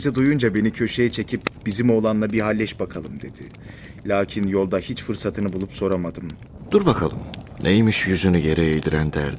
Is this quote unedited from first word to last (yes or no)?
no